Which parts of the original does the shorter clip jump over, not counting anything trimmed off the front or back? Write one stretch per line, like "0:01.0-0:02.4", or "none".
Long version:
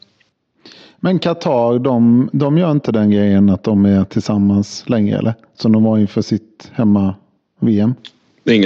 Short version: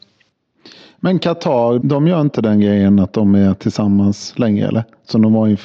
0:01.8-0:02.3